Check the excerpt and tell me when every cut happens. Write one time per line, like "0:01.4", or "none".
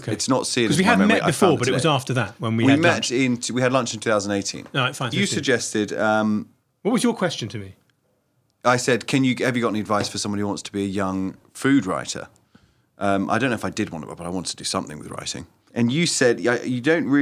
0:05.1